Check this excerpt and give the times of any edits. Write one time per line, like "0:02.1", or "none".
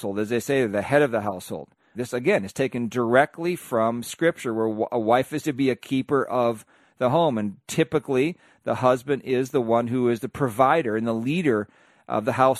0:01.9